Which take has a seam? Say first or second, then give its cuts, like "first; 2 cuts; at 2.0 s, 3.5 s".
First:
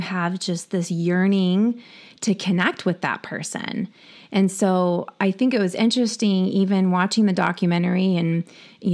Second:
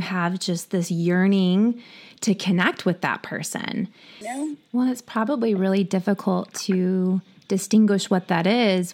second; 1 cut; at 4.2 s